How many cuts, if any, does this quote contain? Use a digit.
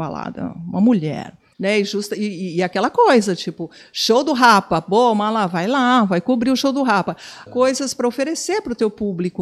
2